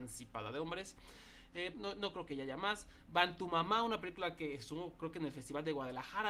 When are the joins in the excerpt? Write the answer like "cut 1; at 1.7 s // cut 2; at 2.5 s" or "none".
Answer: cut 1; at 1.7 s